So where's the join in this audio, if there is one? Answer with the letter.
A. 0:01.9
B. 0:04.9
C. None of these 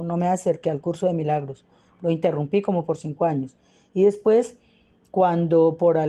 C